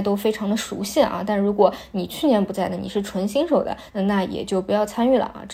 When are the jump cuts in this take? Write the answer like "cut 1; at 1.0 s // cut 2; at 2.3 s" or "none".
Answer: cut 1; at 3.9 s